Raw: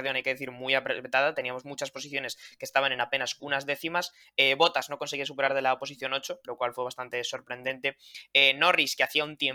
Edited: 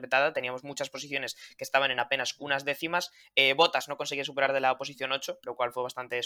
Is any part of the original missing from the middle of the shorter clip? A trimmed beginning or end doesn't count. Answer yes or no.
no